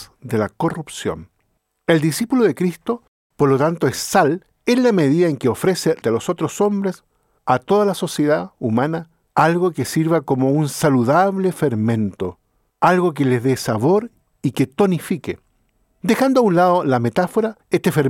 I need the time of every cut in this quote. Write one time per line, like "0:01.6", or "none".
0:06.0